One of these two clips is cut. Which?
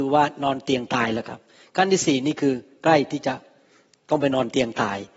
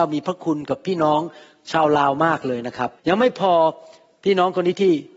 second; 1 cut; at 3.0 s

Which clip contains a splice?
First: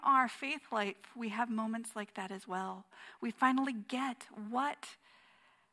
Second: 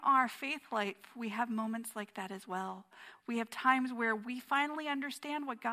first; 1 cut; at 3.2 s

